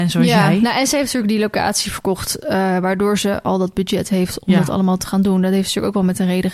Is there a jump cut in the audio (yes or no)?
no